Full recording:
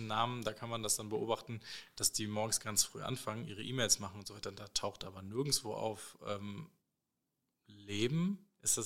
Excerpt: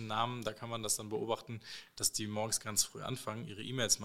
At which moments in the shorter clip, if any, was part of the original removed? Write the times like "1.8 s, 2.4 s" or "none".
none